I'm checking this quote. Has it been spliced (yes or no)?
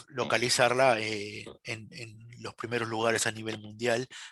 no